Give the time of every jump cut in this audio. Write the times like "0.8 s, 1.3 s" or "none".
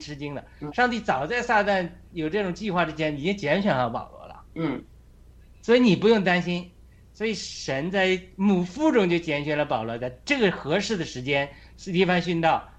none